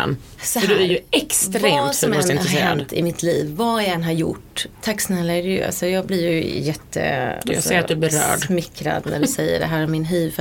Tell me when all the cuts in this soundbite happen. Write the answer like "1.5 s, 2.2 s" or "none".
none

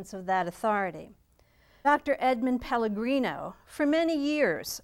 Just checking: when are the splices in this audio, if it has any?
1.8 s

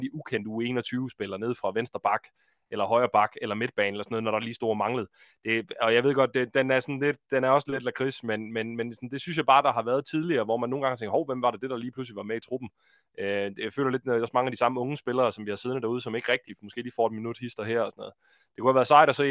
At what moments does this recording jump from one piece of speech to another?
none

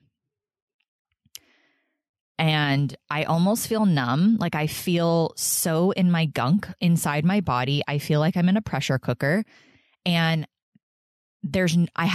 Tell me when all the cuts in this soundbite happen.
none

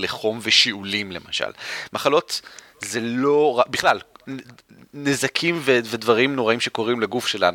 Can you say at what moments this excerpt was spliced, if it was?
none

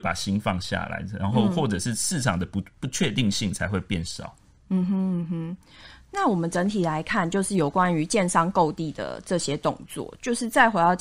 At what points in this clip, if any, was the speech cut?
none

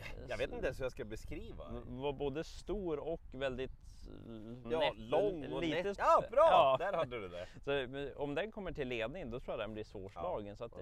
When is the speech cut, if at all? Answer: 4.6 s, 5.9 s

